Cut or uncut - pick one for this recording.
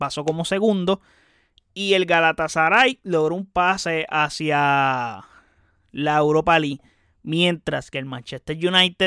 uncut